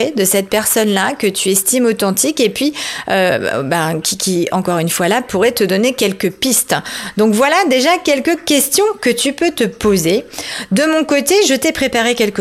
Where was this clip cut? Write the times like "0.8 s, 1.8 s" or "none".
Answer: none